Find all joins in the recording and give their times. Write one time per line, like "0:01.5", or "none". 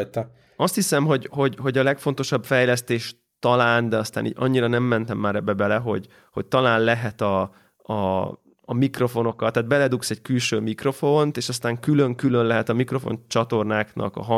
none

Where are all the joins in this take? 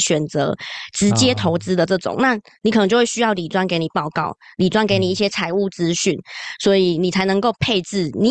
none

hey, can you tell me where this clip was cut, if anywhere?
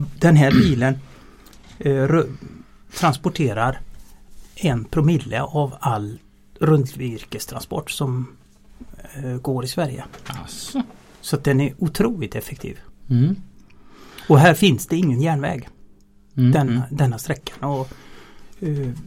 none

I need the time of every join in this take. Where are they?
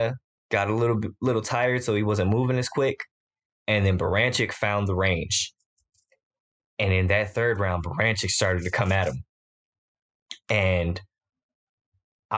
none

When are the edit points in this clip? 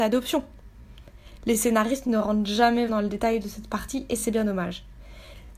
0:02.9

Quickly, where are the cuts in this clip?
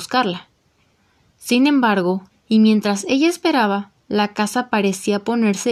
0:02.3

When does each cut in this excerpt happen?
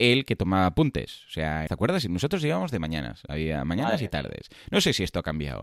0:01.7

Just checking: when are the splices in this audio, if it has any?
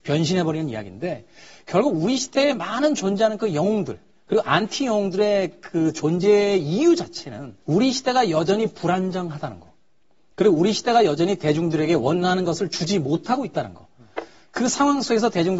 0:07.6

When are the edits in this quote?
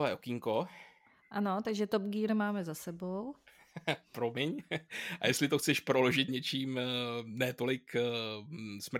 0:06.3

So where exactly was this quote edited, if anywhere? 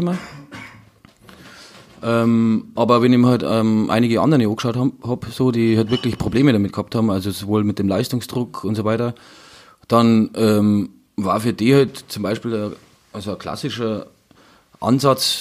none

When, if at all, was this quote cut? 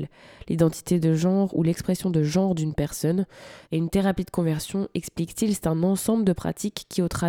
0:03.7

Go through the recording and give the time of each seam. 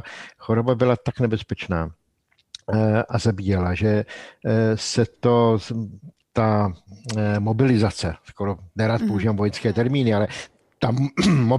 none

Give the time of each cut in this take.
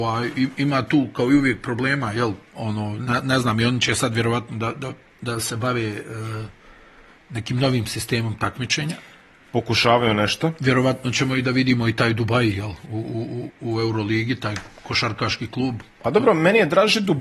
0:13.5

